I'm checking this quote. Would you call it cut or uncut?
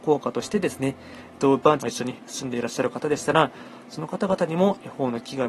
cut